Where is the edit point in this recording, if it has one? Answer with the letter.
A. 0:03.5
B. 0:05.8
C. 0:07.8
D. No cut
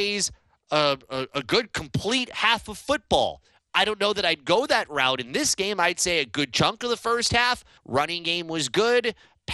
C